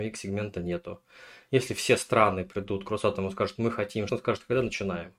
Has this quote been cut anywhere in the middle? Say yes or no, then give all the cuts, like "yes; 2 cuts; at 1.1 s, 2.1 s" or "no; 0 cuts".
yes; 1 cut; at 4.1 s